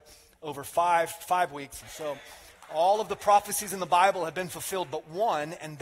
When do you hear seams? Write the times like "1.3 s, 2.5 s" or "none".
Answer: 1.8 s